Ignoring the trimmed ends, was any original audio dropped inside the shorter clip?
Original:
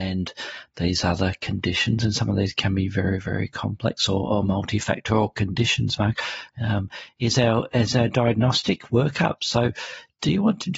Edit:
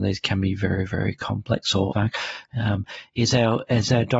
yes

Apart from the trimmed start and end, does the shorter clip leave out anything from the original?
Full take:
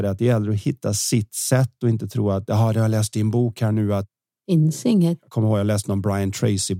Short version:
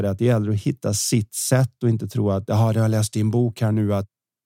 no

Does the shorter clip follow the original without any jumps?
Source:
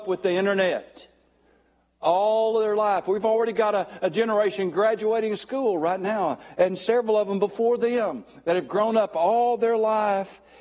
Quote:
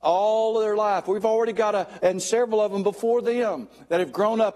no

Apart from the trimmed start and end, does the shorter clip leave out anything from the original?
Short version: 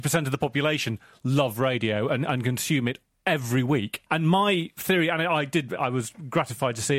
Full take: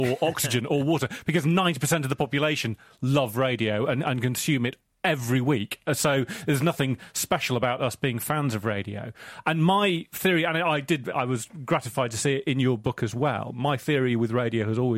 yes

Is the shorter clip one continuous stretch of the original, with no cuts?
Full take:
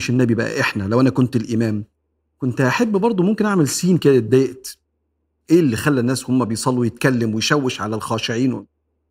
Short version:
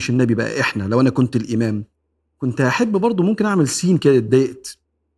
yes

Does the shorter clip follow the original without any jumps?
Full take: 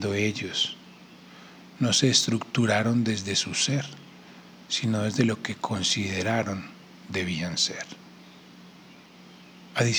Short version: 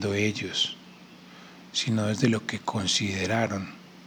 no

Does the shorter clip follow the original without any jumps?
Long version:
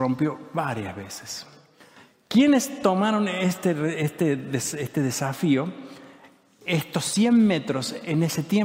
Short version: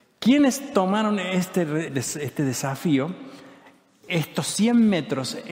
no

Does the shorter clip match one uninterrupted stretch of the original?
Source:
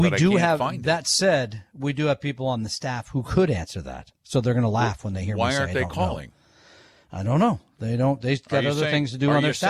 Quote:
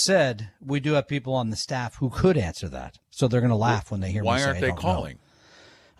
yes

